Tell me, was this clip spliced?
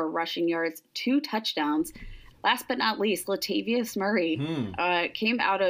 yes; 1 cut; at 2.3 s

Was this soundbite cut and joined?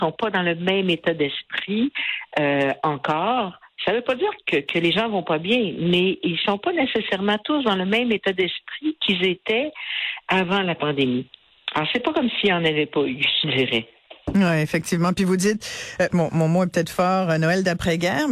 yes; 3 cuts; at 4.4 s, 14.2 s, 16.1 s

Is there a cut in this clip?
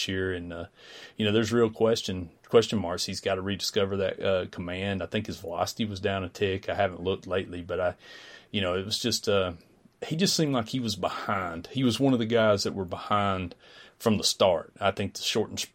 no; 0 cuts

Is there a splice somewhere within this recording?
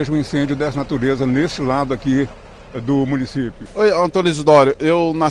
no; 0 cuts

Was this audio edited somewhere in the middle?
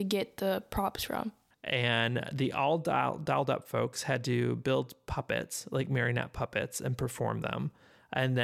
yes; 1 cut; at 1.5 s

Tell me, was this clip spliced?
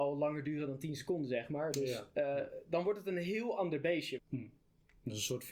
yes; 1 cut; at 4.2 s

